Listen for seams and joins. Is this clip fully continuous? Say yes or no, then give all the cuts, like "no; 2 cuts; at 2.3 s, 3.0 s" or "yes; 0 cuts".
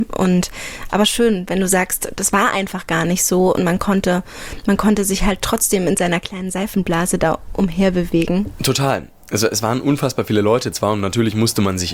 yes; 0 cuts